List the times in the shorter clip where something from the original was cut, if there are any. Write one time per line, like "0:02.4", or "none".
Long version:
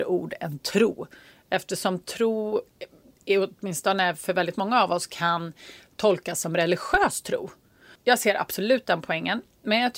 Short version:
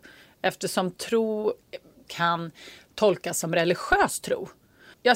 0:02.1